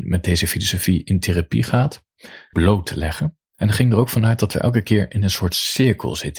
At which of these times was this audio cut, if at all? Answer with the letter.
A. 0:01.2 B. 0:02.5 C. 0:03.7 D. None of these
B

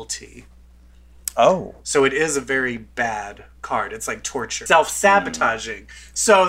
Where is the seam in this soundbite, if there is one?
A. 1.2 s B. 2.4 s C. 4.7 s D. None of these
C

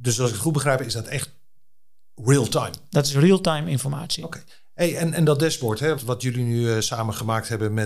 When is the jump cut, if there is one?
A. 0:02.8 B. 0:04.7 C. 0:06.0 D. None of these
C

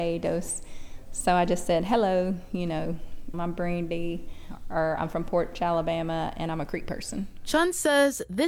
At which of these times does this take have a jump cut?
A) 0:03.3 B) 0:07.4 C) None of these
A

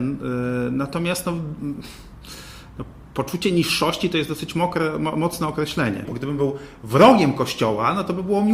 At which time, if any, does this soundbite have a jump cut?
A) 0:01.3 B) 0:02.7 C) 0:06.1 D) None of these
C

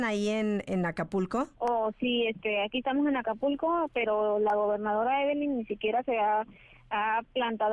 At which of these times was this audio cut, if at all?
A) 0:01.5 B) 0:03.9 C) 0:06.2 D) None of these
A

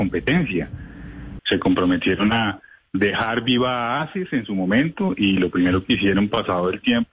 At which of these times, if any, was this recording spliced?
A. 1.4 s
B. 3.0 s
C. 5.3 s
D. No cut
A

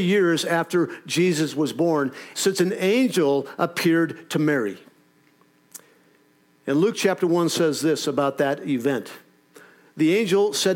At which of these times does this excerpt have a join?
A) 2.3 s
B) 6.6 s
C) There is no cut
A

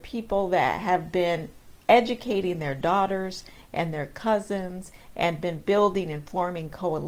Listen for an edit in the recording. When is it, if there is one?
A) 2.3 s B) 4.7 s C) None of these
C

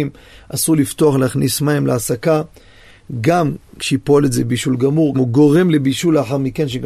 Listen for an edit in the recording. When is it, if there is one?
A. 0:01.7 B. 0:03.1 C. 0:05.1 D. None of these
C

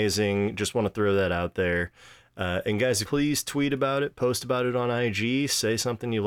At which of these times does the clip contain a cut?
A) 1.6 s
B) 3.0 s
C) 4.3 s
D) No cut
B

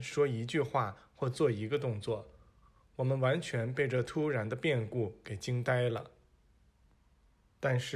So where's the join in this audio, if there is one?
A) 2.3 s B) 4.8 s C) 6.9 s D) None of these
D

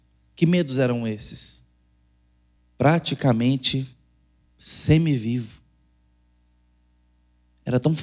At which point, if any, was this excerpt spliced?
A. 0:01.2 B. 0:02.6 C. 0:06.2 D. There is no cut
B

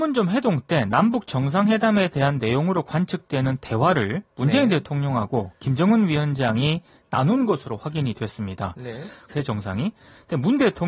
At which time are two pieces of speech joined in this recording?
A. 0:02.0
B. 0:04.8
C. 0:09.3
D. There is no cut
C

